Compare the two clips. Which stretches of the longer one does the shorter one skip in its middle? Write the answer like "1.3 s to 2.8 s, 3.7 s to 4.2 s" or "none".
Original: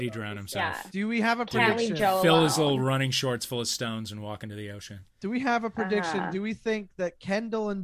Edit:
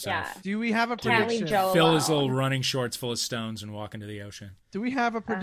none